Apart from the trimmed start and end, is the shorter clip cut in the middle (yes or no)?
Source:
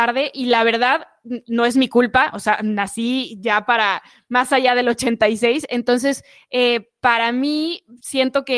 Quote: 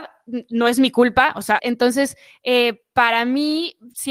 yes